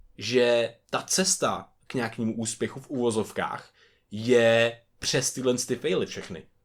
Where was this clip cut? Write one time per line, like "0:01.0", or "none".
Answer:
none